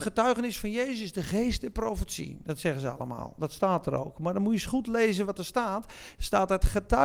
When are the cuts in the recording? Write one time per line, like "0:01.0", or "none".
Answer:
none